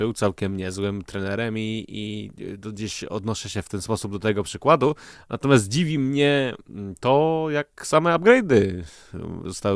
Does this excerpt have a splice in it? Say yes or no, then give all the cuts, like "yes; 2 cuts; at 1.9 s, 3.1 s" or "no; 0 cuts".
no; 0 cuts